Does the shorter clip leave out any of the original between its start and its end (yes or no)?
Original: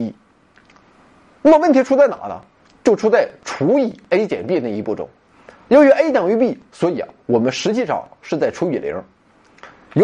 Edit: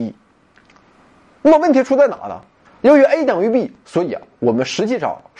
yes